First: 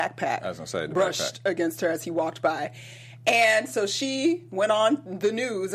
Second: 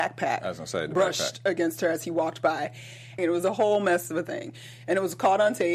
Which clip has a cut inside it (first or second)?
second